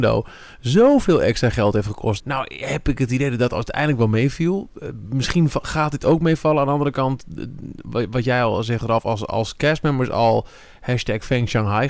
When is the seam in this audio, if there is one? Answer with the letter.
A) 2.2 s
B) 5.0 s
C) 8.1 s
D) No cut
A